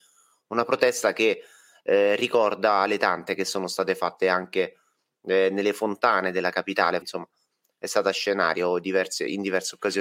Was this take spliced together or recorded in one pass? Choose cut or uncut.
cut